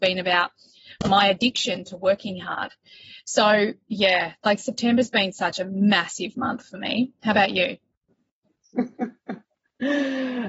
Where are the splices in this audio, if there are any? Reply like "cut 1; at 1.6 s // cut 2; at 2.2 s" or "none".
none

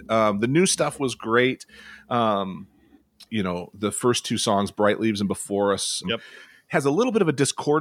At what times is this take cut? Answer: cut 1; at 3.3 s // cut 2; at 6.0 s

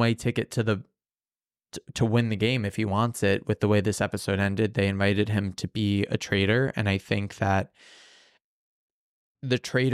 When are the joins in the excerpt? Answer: none

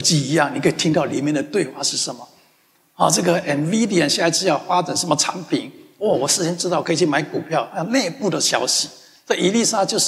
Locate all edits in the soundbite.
cut 1; at 2.8 s

